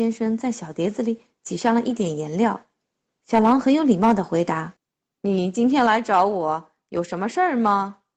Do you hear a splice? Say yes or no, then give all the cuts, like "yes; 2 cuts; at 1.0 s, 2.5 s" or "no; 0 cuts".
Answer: yes; 2 cuts; at 3.1 s, 4.8 s